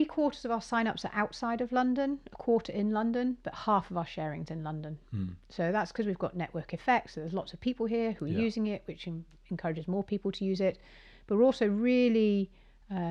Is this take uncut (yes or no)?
yes